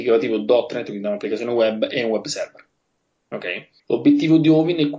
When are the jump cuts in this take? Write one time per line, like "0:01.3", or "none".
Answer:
0:03.8